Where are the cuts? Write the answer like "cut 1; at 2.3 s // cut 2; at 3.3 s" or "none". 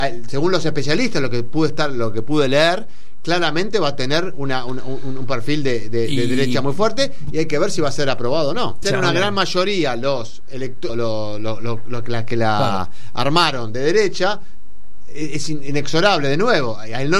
cut 1; at 8.8 s // cut 2; at 10.9 s